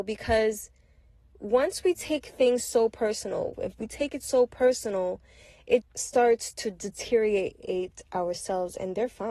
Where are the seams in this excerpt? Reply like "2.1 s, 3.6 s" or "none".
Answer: 3.5 s, 5.8 s